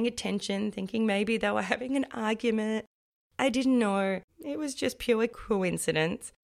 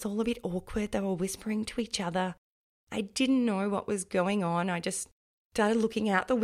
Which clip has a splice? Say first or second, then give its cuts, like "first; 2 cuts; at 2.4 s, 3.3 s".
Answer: first; 1 cut; at 4.3 s